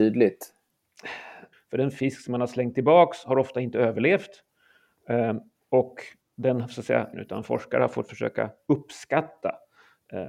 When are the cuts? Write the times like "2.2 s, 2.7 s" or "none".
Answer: 1.5 s, 7.1 s